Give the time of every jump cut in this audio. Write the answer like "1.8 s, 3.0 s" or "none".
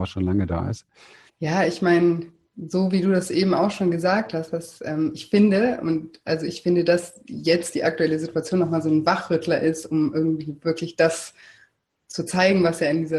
1.3 s